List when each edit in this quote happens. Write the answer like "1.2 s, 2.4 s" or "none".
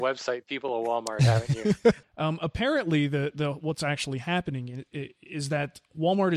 2.0 s